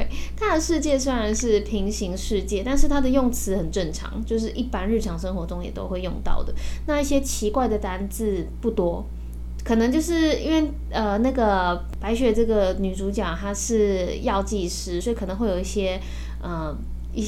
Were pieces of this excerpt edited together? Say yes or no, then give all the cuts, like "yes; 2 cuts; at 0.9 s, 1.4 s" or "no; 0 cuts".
no; 0 cuts